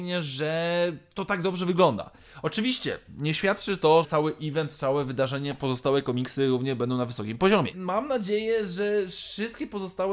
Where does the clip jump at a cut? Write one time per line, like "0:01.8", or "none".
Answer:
0:04.0
0:07.7